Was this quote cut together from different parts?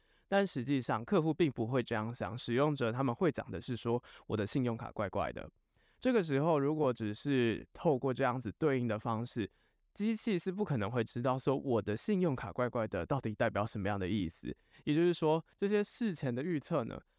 no; 0 cuts

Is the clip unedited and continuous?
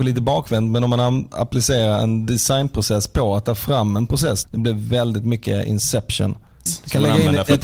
no; 2 cuts; at 4.4 s, 6.7 s

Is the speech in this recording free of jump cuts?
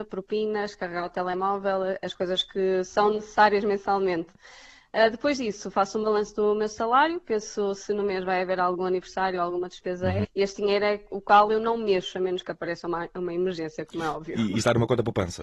no; 1 cut; at 10.2 s

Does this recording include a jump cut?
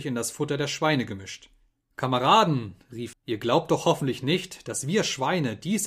yes; 2 cuts; at 1.9 s, 3.1 s

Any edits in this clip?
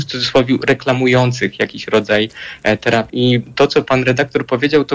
yes; 1 cut; at 3.1 s

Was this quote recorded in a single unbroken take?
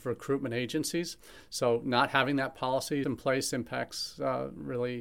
no; 1 cut; at 3.0 s

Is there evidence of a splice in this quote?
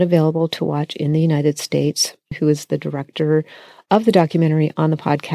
yes; 1 cut; at 2.3 s

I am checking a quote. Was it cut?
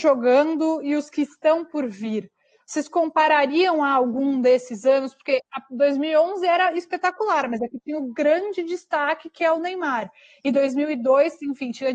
no; 0 cuts

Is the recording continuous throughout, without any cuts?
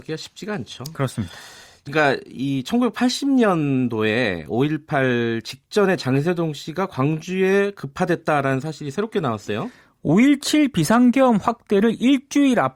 no; 1 cut; at 1.9 s

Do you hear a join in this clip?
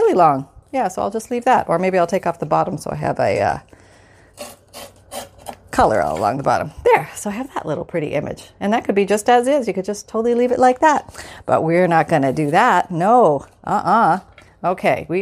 no; 0 cuts

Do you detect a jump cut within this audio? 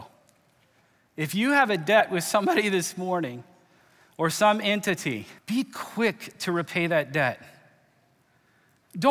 yes; 1 cut; at 5.4 s

